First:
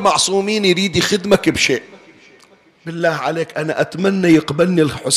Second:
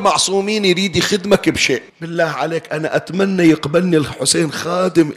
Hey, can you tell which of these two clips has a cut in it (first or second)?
second